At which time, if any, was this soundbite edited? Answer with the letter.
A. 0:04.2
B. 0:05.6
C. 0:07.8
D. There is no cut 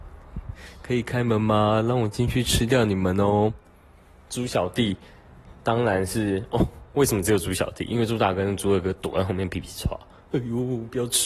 D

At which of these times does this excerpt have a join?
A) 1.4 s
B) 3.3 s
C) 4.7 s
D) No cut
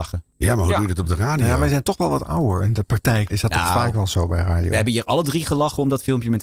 B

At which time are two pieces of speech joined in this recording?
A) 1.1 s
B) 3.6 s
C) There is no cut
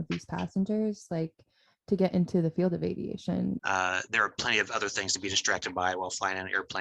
B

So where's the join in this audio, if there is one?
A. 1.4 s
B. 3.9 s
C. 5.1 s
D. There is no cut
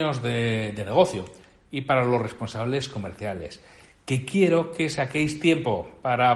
D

